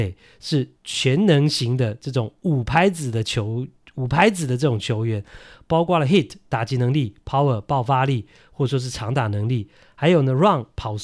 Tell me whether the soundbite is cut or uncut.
uncut